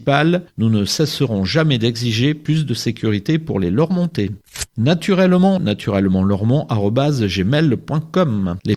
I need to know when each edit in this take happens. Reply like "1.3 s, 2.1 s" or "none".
5.6 s